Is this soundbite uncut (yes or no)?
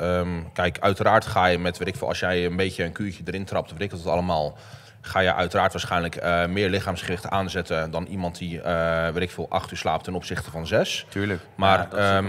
yes